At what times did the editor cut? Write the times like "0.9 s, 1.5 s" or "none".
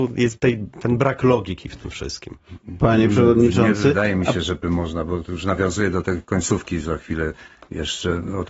none